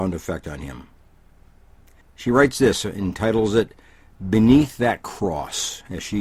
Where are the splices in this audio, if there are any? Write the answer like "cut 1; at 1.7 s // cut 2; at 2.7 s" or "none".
cut 1; at 2.0 s